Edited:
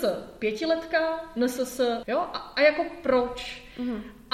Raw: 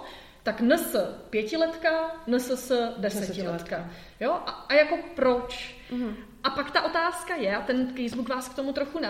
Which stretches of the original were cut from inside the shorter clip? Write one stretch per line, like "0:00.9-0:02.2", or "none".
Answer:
0:02.9-0:04.2